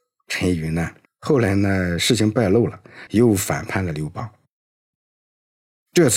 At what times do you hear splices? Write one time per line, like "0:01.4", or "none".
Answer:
0:01.1
0:03.1